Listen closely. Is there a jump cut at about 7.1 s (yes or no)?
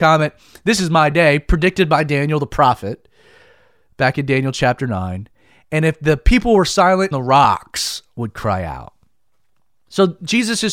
yes